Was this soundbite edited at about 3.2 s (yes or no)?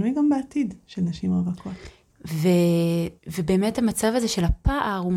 yes